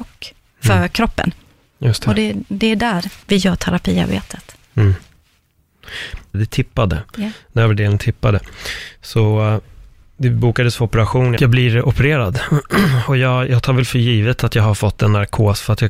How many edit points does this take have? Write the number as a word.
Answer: three